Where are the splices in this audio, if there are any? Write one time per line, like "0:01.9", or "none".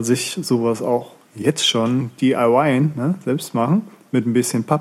none

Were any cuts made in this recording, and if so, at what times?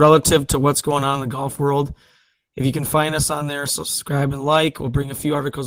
none

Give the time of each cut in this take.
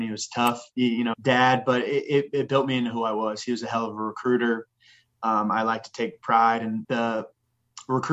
0:01.1
0:06.8

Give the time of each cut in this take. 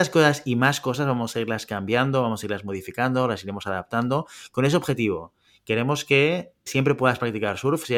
0:06.7

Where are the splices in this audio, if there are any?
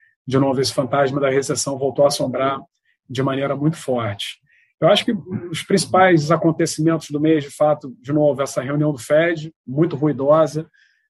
none

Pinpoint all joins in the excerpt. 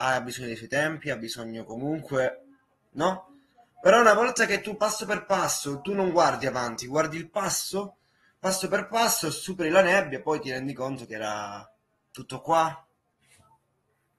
none

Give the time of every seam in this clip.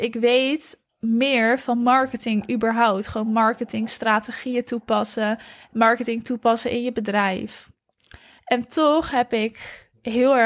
0:08.4

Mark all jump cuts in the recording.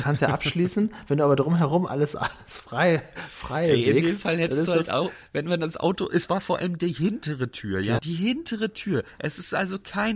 0:08.0

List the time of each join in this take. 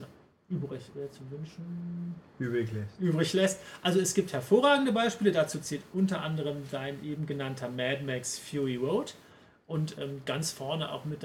0:00.9

